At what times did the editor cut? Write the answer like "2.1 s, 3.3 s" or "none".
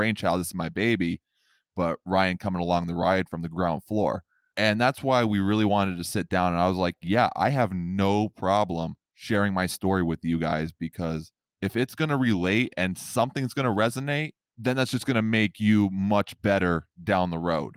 none